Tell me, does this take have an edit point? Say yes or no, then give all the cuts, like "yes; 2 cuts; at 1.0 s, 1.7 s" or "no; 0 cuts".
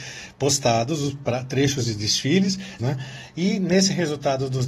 yes; 1 cut; at 2.8 s